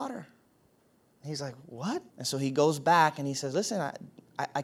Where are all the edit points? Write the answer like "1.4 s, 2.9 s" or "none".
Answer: 2.1 s